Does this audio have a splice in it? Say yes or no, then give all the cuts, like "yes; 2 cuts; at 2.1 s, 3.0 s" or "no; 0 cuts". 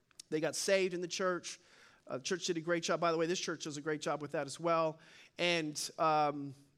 no; 0 cuts